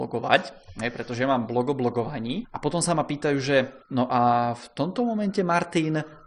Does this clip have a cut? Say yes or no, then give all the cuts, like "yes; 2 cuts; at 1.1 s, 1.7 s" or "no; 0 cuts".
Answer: no; 0 cuts